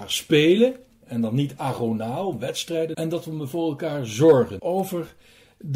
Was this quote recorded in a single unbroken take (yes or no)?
no